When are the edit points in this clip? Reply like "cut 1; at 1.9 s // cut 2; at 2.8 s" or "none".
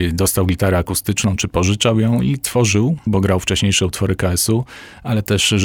cut 1; at 3.1 s